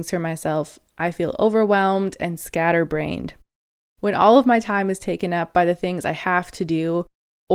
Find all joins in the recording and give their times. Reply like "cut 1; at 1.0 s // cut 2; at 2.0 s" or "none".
cut 1; at 3.8 s